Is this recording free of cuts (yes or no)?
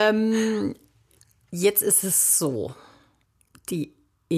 yes